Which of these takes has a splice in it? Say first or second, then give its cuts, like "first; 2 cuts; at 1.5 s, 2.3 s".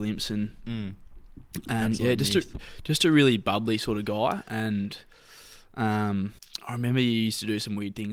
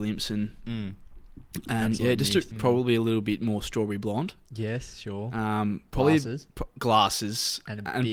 second; 1 cut; at 2.5 s